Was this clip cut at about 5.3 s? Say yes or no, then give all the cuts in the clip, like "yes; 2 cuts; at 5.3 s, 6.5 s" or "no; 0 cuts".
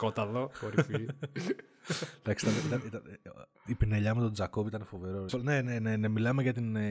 yes; 1 cut; at 5.3 s